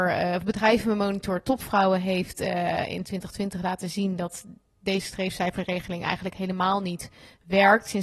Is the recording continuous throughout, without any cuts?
yes; 0 cuts

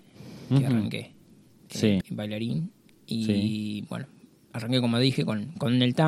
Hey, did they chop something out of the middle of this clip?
yes; 1 cut; at 2.0 s

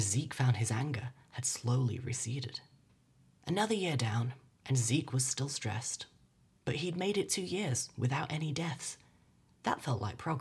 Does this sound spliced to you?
no; 0 cuts

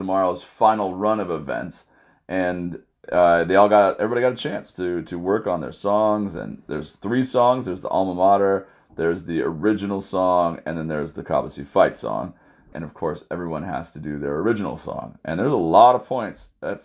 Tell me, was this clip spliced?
yes; 1 cut; at 12.7 s

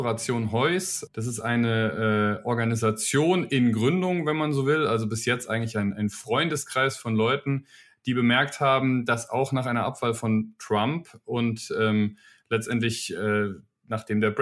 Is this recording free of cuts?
yes; 0 cuts

